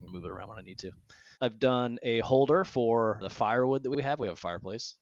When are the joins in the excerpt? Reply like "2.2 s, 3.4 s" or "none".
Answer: 1.3 s